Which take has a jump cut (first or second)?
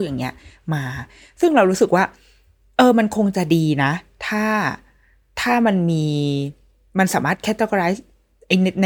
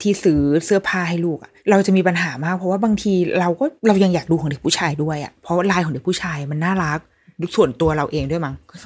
second